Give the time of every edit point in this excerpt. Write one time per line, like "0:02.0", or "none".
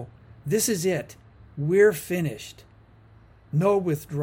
none